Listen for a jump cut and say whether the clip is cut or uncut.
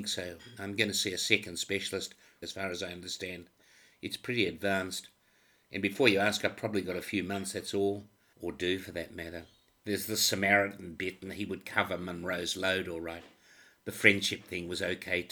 cut